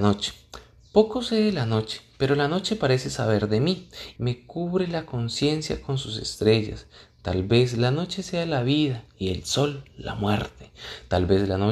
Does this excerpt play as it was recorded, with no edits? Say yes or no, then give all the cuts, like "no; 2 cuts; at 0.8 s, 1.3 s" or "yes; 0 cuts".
no; 1 cut; at 4.2 s